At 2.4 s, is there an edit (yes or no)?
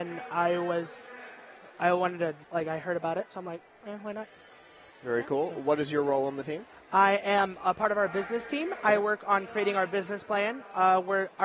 yes